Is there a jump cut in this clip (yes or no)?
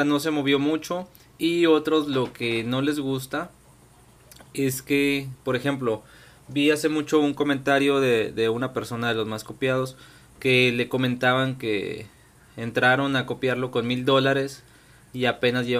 no